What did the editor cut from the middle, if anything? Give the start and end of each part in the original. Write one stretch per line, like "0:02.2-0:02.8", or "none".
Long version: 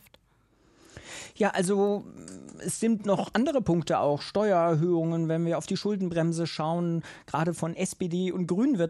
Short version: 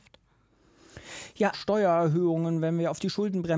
0:01.5-0:04.2